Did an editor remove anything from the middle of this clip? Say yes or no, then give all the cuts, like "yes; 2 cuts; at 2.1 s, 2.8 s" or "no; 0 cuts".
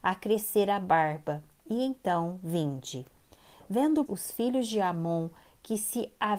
yes; 1 cut; at 4.1 s